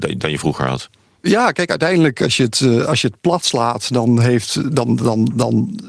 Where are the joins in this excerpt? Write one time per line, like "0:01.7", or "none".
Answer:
none